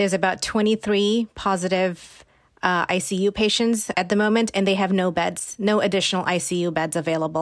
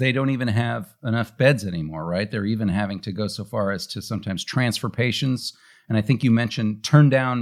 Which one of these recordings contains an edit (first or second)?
first